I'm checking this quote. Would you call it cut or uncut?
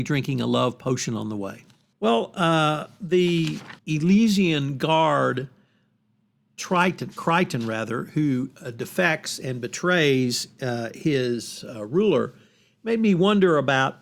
cut